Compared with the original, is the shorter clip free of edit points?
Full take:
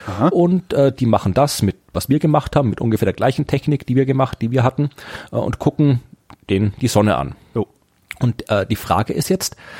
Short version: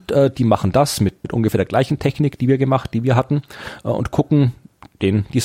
no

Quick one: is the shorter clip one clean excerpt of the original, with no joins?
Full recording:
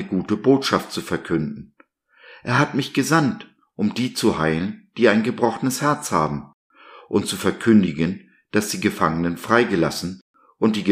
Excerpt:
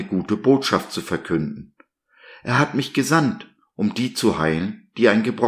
yes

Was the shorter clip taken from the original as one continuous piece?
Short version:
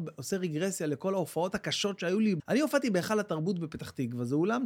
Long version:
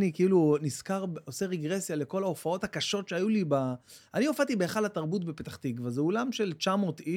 no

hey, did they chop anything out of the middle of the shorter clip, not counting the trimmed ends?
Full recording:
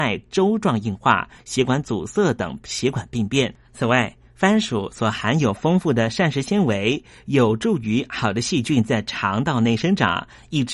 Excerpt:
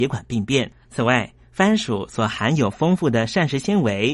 no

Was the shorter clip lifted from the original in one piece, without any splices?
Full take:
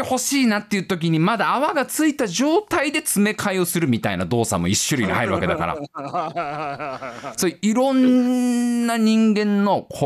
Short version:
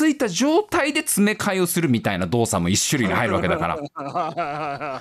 yes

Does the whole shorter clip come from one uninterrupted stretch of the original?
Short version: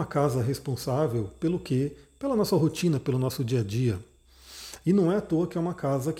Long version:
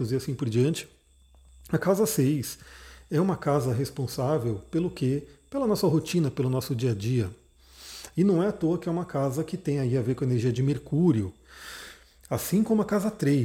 yes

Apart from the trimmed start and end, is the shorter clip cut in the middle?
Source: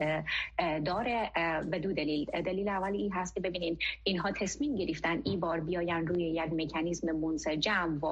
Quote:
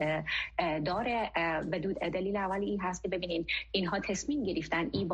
yes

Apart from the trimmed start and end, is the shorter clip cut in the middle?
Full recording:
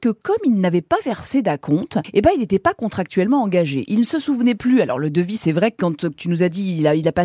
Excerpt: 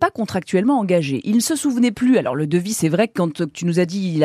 no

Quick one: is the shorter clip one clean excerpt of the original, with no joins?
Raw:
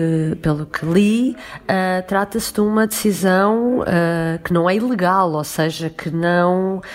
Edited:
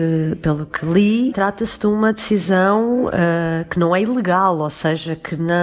no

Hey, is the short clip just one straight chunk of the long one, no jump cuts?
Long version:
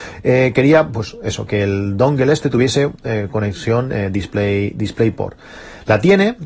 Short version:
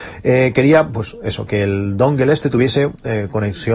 yes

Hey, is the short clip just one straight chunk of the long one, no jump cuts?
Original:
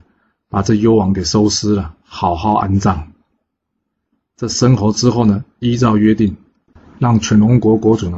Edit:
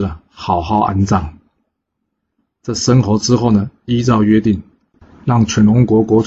yes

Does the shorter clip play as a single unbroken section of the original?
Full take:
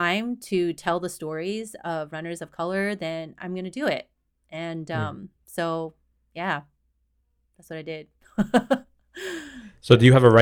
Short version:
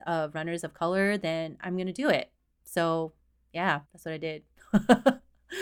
no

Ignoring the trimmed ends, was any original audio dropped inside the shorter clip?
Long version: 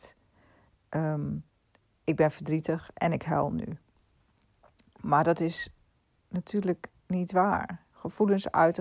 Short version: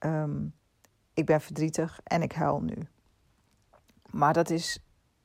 no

